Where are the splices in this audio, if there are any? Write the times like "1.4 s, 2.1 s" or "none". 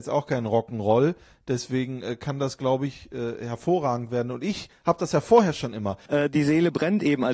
6.1 s